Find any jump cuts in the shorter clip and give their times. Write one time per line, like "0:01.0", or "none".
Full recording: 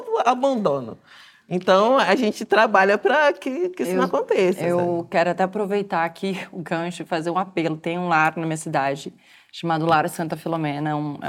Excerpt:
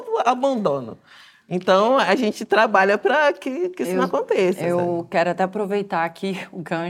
none